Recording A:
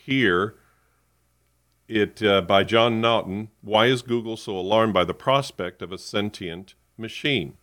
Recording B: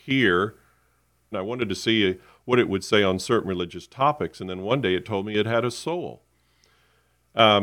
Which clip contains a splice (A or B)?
B